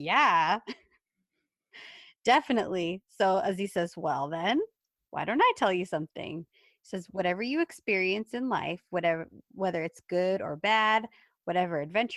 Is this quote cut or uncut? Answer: uncut